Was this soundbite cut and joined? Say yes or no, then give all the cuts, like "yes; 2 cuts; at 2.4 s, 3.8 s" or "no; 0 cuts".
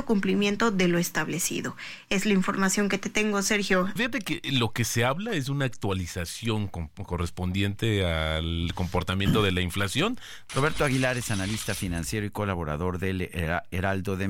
yes; 2 cuts; at 4.0 s, 10.5 s